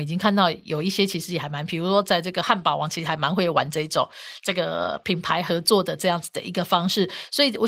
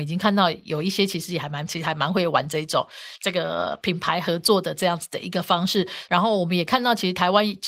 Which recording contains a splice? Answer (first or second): second